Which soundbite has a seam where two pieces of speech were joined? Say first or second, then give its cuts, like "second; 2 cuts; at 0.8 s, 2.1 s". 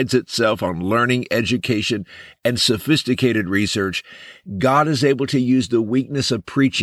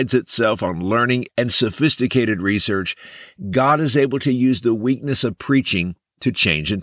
second; 1 cut; at 1.3 s